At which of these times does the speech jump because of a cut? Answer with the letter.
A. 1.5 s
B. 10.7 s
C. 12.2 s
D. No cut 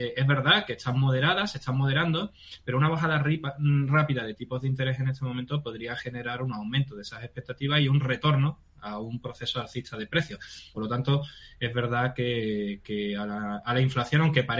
B